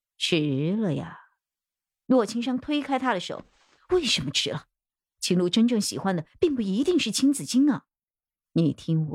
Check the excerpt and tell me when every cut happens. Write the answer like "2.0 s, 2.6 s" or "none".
none